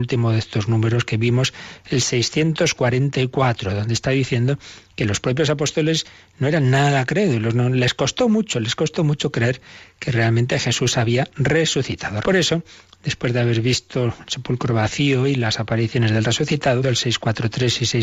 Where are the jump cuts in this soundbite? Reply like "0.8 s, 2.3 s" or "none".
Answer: 12.2 s, 16.8 s